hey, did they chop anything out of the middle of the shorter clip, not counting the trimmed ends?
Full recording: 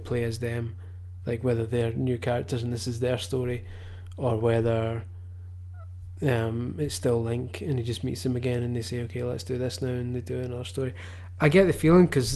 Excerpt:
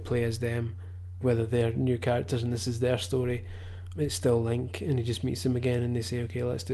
yes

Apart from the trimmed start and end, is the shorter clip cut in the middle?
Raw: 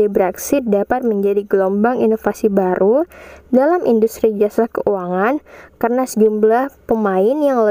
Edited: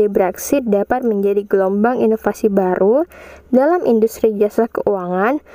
no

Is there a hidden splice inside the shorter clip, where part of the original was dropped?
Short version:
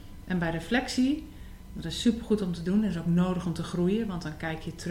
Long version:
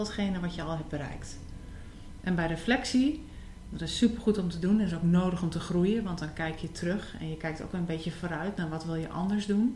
no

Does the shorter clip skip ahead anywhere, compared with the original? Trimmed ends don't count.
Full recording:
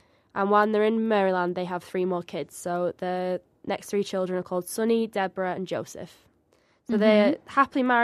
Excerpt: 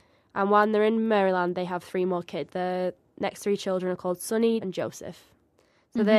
yes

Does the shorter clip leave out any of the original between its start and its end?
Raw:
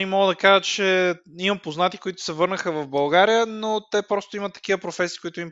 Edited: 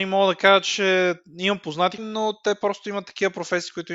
yes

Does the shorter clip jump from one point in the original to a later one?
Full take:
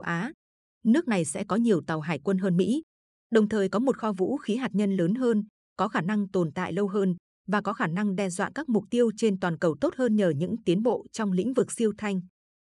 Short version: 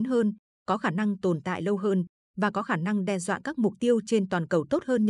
no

